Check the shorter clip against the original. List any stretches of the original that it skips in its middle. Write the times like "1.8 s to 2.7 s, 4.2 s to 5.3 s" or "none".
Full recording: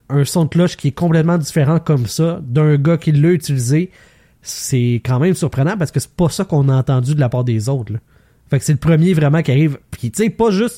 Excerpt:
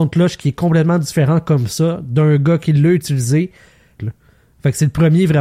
4.4 s to 7.9 s